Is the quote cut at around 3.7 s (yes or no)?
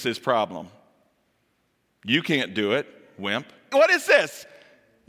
yes